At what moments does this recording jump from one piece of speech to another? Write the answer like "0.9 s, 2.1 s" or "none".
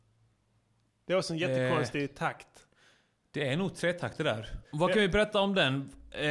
4.6 s